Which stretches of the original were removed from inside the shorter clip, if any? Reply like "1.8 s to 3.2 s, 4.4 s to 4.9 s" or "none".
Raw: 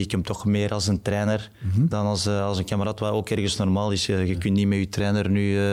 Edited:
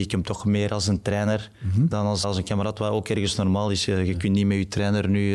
2.2 s to 2.4 s